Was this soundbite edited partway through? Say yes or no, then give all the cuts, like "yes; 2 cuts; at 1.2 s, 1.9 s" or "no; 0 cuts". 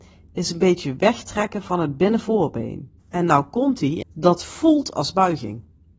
yes; 2 cuts; at 3.0 s, 4.0 s